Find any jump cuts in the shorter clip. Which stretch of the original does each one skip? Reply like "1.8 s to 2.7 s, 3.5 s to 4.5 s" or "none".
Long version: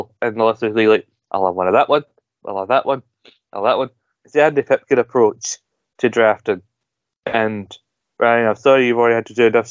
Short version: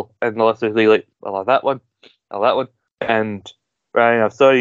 1.1 s to 2.3 s, 4.1 s to 7.1 s